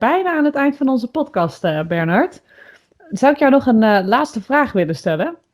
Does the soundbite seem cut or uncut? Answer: uncut